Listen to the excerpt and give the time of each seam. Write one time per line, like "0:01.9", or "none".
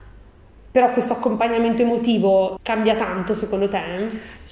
0:02.6